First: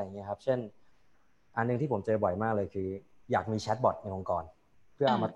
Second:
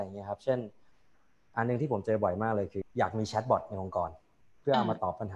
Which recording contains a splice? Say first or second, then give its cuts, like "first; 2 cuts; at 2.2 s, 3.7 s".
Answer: second; 1 cut; at 2.8 s